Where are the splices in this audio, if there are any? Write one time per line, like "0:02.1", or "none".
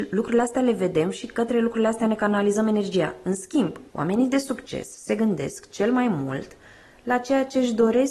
0:03.9